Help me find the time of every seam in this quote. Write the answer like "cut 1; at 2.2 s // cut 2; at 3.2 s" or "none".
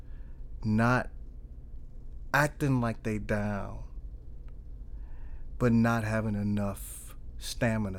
none